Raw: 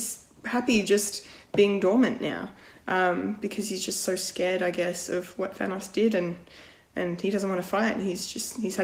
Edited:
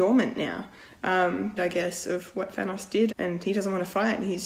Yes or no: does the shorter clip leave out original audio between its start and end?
yes